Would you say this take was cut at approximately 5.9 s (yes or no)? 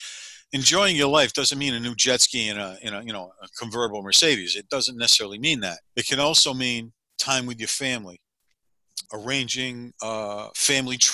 yes